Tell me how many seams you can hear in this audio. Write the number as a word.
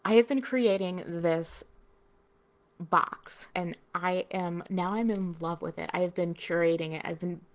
one